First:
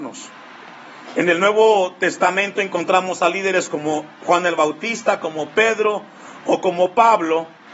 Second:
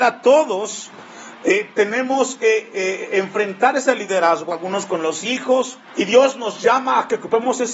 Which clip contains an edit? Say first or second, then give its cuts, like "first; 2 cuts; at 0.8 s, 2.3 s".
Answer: second; 2 cuts; at 4.5 s, 5.9 s